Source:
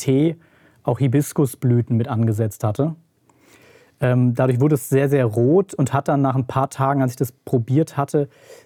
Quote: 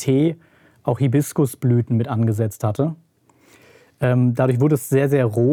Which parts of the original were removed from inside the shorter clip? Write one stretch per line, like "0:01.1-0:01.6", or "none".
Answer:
none